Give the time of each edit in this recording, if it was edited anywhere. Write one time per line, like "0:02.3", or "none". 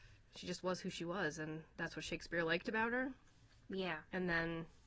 none